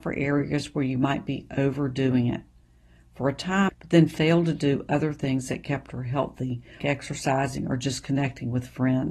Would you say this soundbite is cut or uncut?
cut